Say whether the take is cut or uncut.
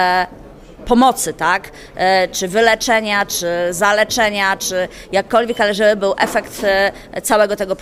uncut